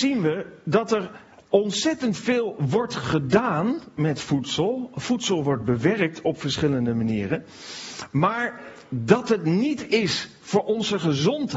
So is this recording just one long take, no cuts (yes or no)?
yes